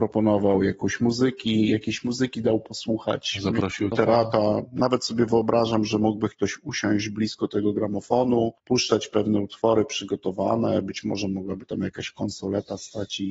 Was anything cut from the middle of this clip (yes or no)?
yes